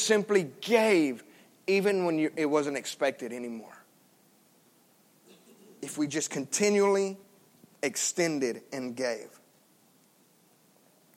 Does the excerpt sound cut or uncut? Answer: uncut